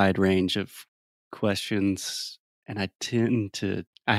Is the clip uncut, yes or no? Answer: yes